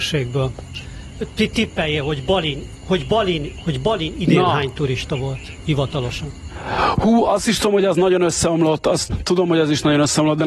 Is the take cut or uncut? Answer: cut